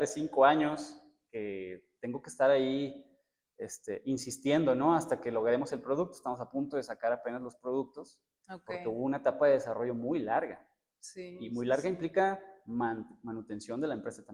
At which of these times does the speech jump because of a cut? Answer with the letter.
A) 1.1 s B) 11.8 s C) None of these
C